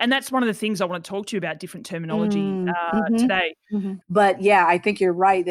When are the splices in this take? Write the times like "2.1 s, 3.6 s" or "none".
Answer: 4.0 s